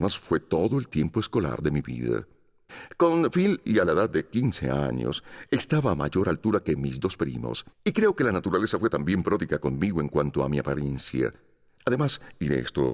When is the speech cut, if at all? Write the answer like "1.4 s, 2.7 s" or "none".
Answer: 3.7 s, 7.7 s, 11.8 s